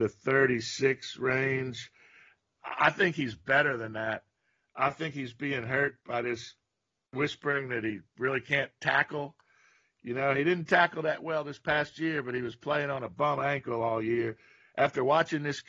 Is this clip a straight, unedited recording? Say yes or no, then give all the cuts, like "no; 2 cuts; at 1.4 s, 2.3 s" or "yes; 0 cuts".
yes; 0 cuts